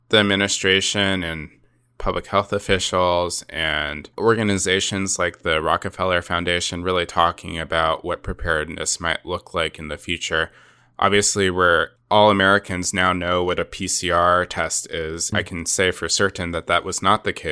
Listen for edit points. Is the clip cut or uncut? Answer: cut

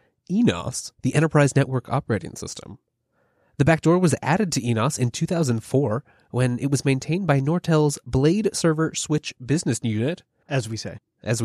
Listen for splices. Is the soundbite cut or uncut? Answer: cut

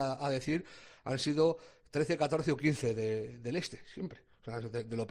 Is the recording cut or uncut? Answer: uncut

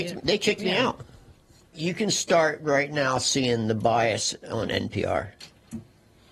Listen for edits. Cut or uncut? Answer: cut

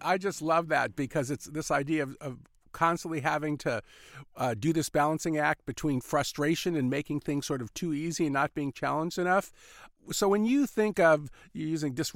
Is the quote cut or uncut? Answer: uncut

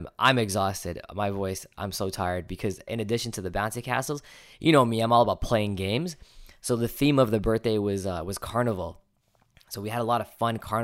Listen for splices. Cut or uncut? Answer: cut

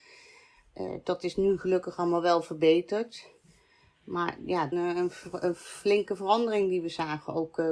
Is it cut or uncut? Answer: cut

